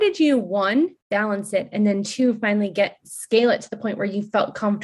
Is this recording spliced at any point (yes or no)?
no